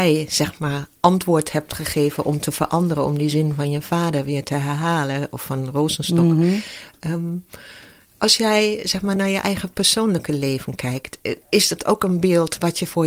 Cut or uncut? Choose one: uncut